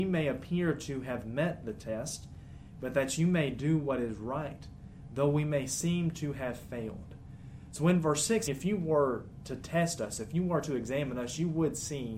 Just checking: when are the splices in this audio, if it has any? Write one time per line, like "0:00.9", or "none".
0:08.5